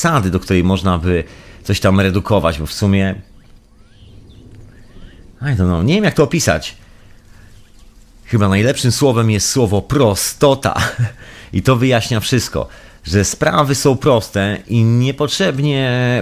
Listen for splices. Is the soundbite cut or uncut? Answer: uncut